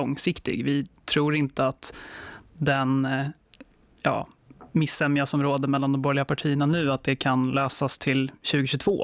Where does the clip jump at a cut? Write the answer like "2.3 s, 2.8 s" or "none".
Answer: none